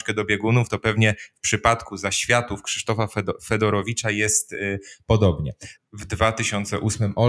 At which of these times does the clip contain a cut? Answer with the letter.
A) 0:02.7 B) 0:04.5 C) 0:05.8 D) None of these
C